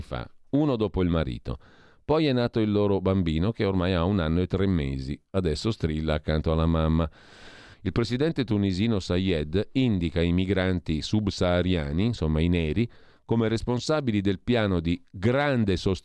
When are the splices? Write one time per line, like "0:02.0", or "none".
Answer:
0:07.7